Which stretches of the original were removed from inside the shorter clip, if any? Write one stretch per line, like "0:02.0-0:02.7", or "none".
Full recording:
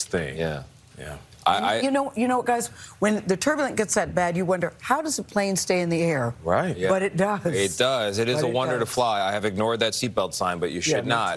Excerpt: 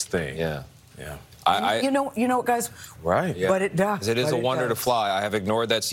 0:02.9-0:06.4
0:07.4-0:08.1